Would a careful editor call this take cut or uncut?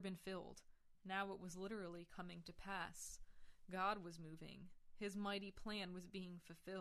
cut